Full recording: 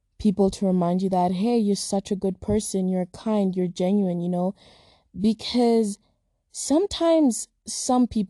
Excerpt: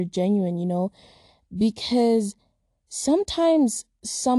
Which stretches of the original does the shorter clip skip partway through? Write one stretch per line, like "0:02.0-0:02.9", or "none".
none